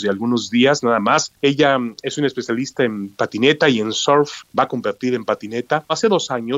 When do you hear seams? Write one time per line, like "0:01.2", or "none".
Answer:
none